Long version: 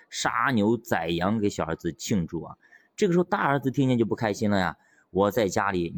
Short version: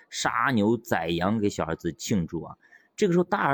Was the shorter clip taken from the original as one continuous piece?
yes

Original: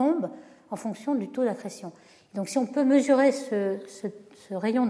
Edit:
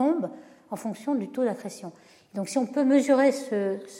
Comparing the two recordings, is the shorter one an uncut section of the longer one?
yes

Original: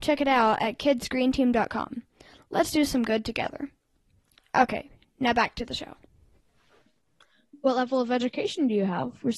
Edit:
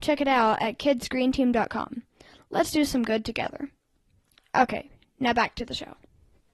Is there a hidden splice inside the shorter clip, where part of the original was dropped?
no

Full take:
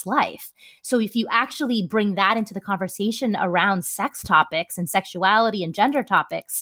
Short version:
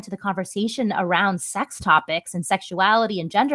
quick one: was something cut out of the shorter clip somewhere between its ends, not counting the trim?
no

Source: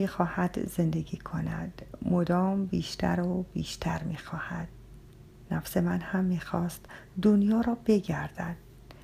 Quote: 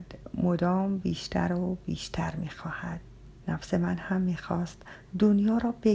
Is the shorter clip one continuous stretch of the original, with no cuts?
no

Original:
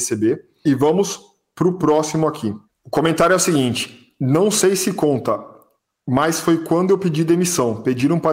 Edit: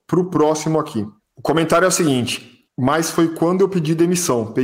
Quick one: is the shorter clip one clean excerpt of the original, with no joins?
no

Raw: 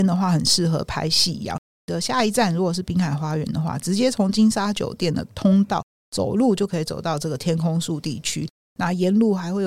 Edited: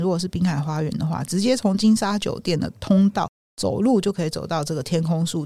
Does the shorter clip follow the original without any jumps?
yes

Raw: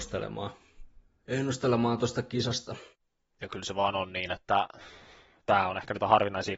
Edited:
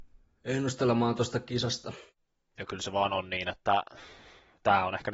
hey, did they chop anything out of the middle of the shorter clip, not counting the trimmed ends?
no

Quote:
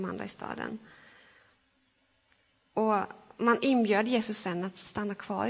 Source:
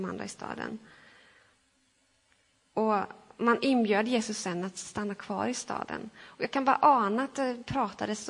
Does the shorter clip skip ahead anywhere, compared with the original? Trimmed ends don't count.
no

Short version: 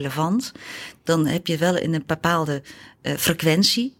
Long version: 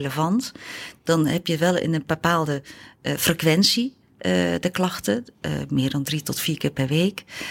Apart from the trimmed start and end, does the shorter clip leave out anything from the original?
no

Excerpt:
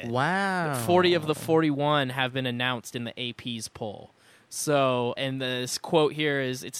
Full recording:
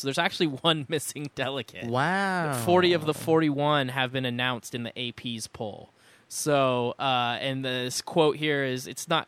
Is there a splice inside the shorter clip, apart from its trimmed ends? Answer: yes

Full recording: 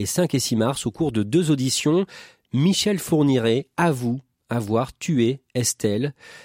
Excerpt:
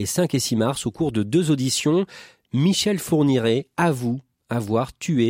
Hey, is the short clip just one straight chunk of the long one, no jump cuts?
yes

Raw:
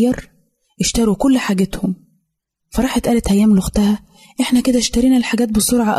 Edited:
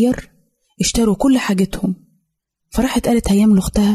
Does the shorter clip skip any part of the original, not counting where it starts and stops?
no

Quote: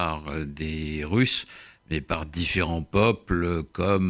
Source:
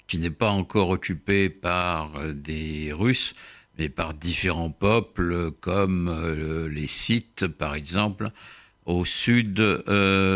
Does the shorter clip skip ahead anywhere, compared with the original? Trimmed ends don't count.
no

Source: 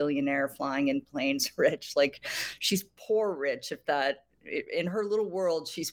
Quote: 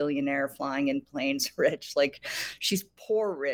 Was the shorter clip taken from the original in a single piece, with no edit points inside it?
yes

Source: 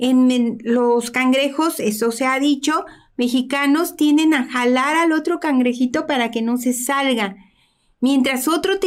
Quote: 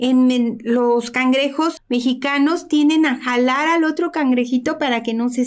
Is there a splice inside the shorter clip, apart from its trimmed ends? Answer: yes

